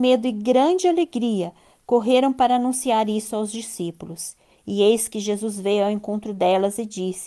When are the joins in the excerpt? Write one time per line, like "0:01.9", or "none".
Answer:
none

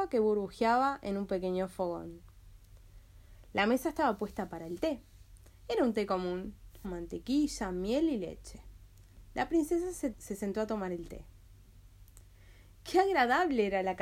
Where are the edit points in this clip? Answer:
0:06.8
0:10.1

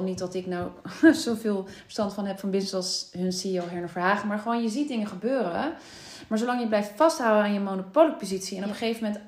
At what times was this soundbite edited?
none

